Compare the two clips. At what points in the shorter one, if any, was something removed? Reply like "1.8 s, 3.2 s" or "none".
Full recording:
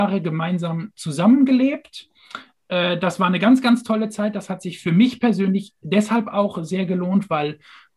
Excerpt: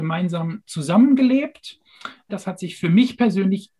2.3 s